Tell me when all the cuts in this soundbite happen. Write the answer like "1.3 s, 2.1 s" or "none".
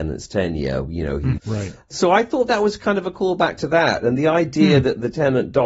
1.4 s